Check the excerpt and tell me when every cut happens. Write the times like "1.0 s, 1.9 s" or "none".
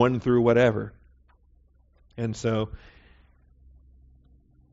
none